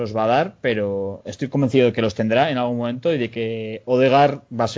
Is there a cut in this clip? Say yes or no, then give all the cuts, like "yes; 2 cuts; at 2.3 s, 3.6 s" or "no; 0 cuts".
no; 0 cuts